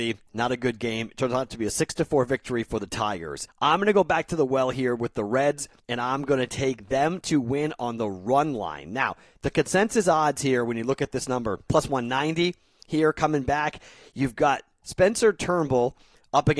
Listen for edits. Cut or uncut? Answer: cut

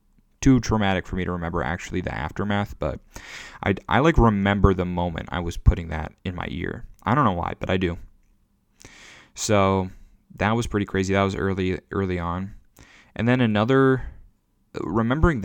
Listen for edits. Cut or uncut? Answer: uncut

